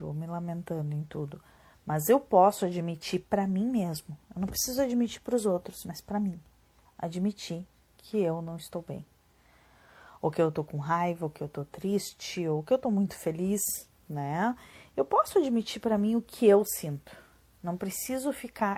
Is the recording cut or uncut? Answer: uncut